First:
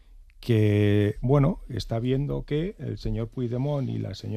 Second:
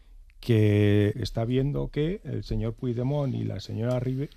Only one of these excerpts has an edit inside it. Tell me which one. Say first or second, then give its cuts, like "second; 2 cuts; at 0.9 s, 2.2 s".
second; 1 cut; at 1.1 s